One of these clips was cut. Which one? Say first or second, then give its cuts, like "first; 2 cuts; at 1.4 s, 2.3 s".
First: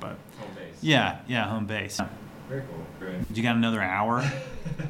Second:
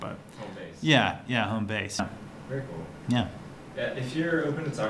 first; 1 cut; at 3.0 s